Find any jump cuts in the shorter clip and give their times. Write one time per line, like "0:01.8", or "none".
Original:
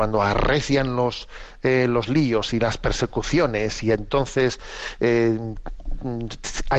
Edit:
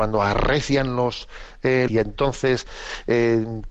0:01.9